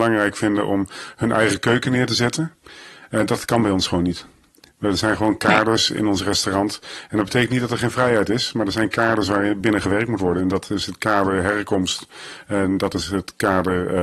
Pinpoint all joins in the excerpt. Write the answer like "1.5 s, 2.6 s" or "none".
none